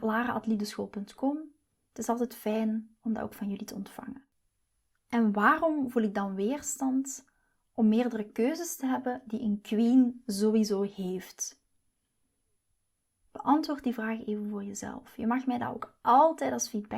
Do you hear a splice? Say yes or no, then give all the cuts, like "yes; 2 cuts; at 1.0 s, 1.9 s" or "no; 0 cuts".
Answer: yes; 1 cut; at 5.0 s